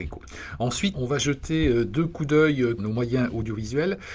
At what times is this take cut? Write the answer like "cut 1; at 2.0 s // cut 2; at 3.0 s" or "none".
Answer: cut 1; at 0.9 s // cut 2; at 2.8 s